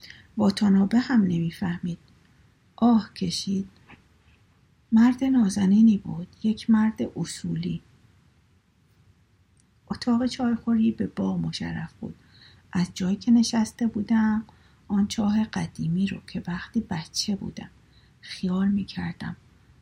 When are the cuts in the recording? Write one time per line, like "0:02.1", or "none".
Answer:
none